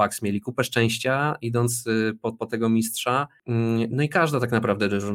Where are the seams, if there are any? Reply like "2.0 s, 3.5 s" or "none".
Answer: 2.3 s